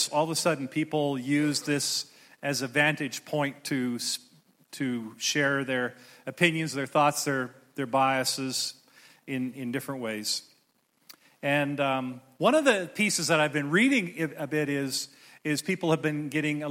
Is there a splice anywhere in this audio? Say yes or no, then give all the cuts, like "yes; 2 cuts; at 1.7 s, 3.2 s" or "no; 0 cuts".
no; 0 cuts